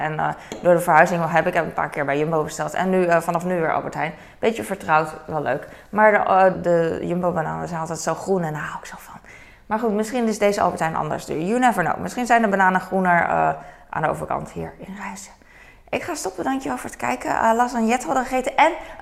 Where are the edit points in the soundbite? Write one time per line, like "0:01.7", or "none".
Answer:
0:06.5